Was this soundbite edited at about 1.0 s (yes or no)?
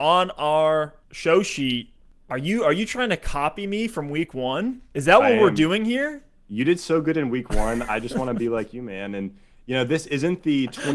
yes